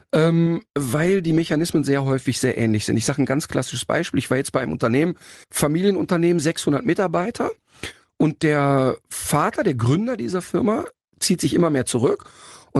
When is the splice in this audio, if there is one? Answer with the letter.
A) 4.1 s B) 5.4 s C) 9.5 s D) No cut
B